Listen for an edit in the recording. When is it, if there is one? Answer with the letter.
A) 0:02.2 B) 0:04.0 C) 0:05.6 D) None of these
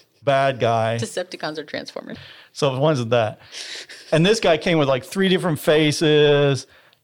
A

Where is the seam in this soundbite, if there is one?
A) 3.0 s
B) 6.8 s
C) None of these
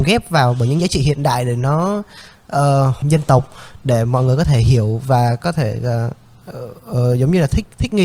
A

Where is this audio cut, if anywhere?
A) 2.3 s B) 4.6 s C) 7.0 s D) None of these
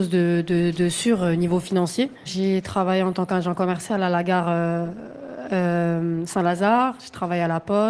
A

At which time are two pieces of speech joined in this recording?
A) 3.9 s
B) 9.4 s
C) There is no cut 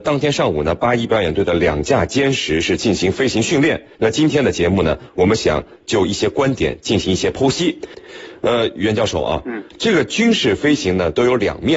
A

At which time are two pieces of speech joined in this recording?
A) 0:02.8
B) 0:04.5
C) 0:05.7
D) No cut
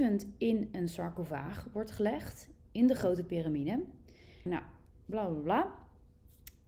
B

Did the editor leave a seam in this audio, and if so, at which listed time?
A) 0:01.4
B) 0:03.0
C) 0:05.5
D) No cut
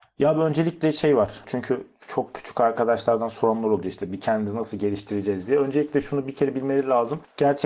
A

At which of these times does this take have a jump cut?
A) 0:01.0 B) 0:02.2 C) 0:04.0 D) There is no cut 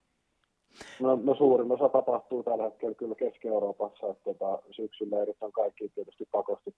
A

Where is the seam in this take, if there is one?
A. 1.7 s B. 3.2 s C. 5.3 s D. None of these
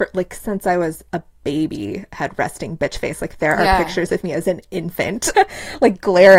C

